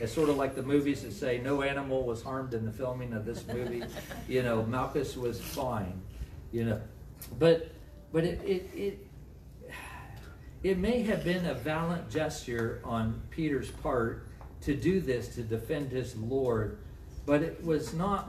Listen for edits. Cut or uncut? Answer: uncut